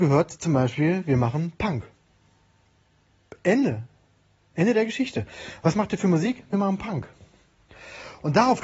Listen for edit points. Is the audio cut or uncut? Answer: uncut